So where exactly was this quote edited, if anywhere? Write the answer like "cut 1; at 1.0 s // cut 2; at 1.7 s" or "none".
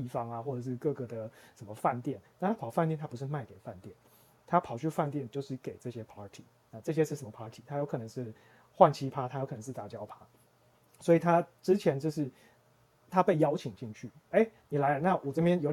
cut 1; at 14.3 s